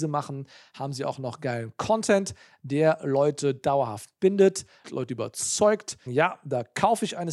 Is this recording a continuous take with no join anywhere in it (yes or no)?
no